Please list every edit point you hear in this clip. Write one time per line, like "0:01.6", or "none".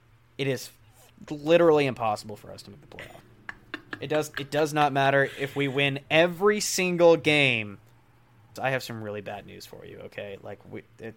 0:03.2
0:08.6